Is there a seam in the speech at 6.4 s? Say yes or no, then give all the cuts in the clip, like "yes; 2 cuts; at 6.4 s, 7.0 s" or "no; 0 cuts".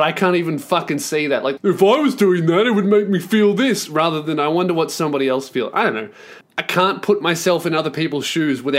yes; 2 cuts; at 1.6 s, 6.4 s